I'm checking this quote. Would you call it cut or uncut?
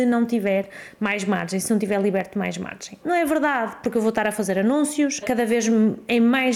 cut